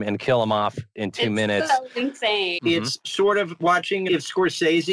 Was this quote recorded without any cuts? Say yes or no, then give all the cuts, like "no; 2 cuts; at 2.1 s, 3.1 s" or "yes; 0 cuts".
no; 1 cut; at 2.6 s